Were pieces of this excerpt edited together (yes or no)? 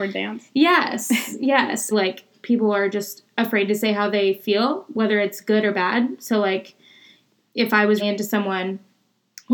yes